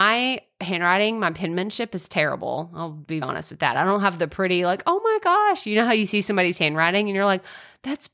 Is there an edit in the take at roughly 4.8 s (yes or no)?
no